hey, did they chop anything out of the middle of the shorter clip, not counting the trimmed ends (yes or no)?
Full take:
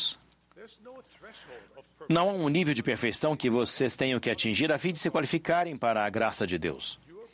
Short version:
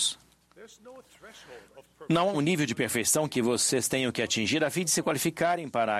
yes